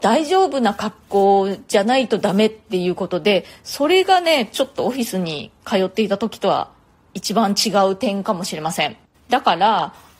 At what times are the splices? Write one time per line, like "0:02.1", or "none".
0:09.1